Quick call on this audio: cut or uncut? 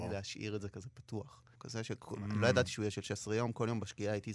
cut